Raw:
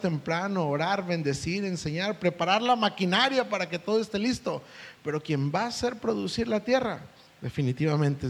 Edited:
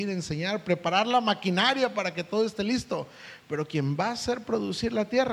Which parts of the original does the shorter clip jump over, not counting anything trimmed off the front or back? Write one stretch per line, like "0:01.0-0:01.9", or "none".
none